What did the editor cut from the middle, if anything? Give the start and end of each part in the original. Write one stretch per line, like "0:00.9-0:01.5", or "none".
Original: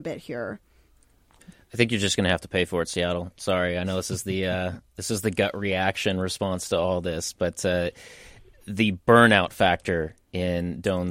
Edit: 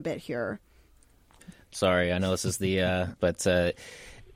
0:01.7-0:03.3
0:04.8-0:07.3